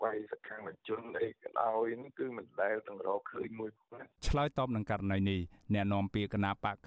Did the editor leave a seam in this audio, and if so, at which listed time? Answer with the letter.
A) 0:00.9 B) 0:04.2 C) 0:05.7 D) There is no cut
B